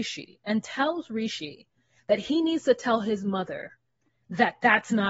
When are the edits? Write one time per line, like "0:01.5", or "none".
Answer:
none